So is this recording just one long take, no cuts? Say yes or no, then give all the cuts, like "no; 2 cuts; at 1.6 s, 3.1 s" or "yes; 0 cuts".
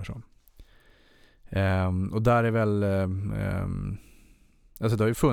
yes; 0 cuts